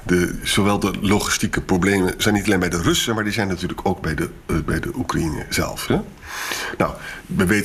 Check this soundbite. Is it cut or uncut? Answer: cut